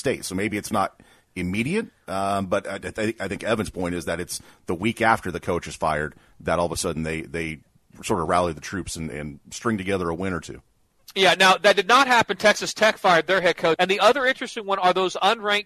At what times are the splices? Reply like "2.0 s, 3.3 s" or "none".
13.8 s